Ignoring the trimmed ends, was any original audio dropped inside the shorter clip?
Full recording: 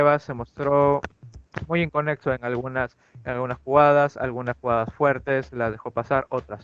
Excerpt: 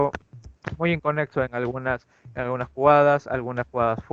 no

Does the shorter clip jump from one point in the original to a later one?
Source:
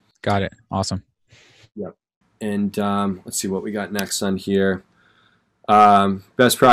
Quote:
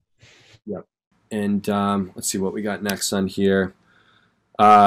no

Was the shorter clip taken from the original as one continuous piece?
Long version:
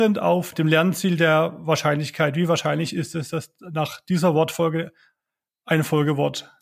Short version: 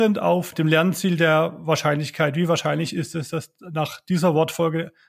yes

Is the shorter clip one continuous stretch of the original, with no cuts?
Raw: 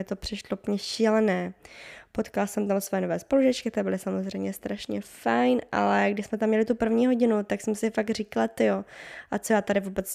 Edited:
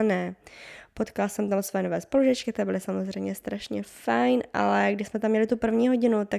yes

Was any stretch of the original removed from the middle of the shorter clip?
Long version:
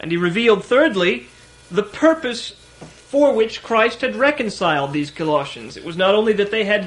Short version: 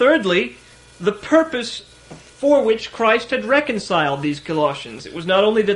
no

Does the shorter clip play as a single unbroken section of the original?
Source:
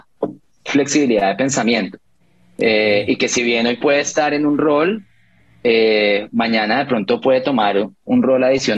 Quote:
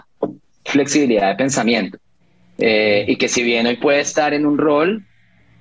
yes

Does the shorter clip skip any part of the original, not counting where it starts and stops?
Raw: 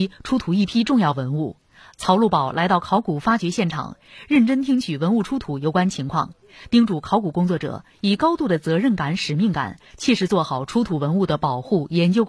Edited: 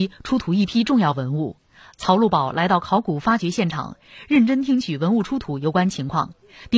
no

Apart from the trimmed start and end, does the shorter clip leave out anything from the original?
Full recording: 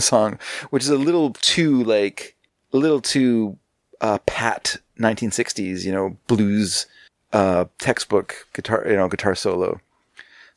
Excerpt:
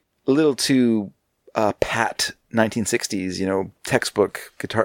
yes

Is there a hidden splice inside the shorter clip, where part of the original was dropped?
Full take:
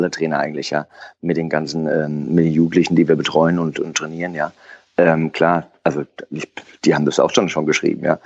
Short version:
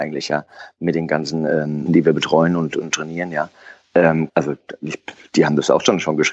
yes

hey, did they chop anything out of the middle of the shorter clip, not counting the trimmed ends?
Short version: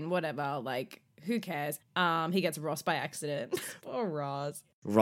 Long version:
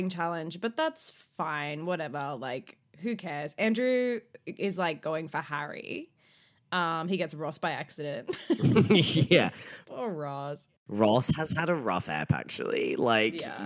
yes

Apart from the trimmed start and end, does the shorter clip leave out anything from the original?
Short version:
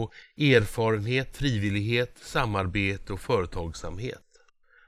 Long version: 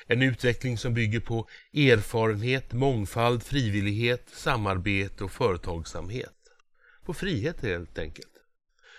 yes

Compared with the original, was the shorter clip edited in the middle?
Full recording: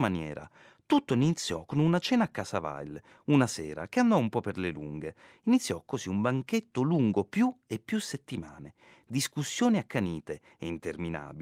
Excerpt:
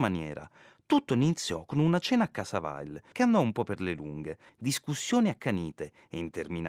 yes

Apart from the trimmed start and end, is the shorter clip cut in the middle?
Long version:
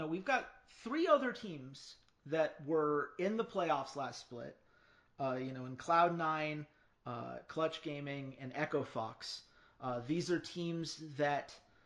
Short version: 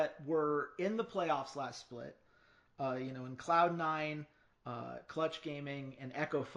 no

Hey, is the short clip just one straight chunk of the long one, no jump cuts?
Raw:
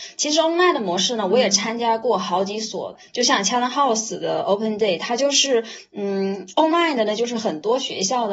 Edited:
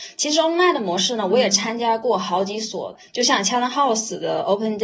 yes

